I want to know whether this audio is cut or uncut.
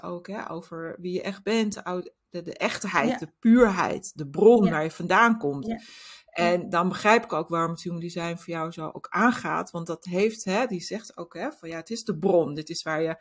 uncut